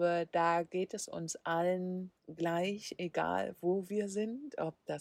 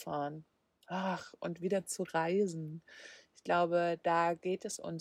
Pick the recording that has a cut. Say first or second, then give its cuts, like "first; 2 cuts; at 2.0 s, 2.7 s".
first; 1 cut; at 2.2 s